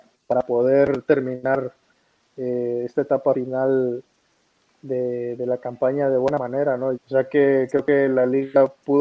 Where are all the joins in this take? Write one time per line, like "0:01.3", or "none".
0:06.9